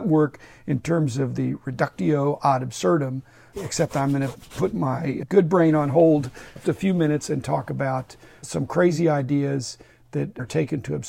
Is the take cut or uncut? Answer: cut